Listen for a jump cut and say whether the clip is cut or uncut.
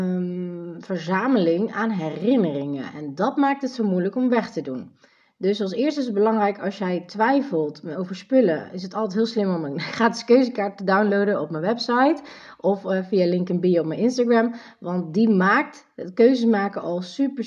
uncut